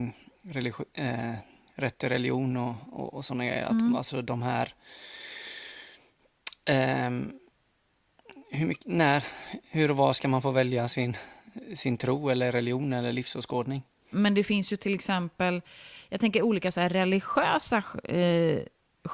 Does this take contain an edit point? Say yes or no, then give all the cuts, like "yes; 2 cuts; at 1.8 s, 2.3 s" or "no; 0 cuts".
yes; 1 cut; at 14.1 s